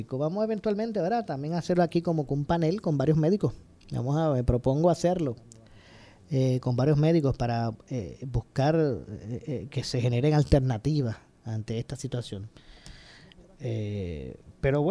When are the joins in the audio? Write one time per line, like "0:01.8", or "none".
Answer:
none